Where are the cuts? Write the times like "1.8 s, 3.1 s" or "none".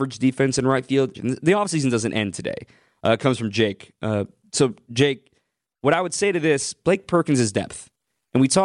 1.1 s